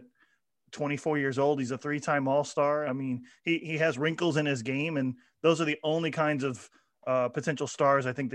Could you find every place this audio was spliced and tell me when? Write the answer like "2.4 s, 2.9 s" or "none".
none